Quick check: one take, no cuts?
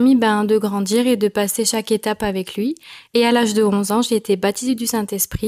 yes; 0 cuts

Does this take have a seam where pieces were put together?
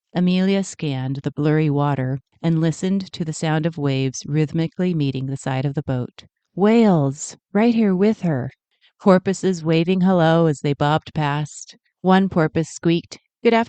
yes; 2 cuts; at 6.4 s, 8.8 s

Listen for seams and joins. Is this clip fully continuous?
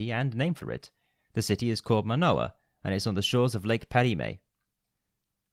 yes; 0 cuts

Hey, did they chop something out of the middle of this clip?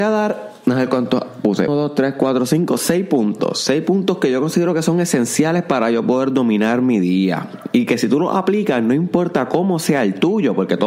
yes; 1 cut; at 1.7 s

